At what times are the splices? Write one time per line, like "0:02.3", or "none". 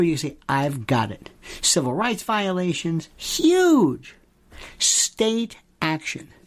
0:03.1